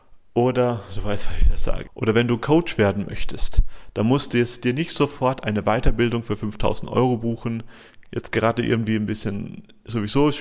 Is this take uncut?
no; 2 cuts; at 1.8 s, 8.0 s

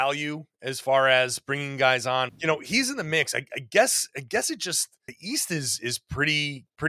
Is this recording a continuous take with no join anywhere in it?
no; 1 cut; at 2.3 s

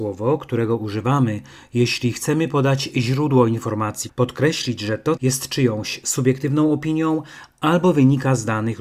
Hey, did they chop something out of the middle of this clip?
yes; 2 cuts; at 4.1 s, 5.2 s

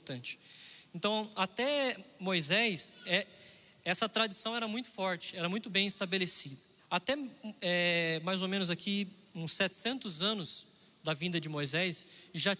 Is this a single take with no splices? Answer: no; 1 cut; at 6.8 s

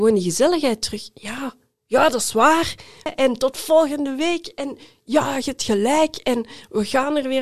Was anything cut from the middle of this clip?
yes; 1 cut; at 3.1 s

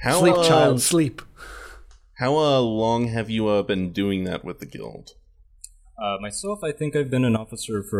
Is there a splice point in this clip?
no; 0 cuts

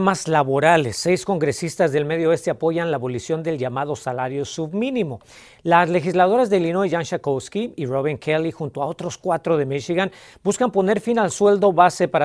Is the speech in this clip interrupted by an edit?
no; 0 cuts

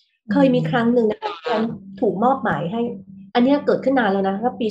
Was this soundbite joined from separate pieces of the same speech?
yes; 1 cut; at 3.3 s

